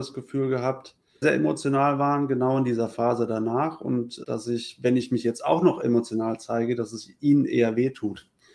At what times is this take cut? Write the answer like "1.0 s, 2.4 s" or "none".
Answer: 1.2 s, 4.2 s